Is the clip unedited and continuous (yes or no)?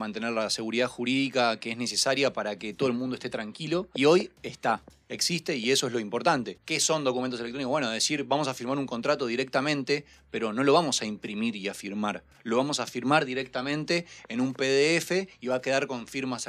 no